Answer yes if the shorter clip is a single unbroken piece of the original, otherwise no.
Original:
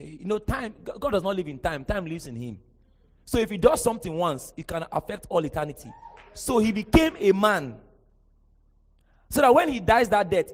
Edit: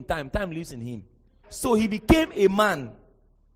no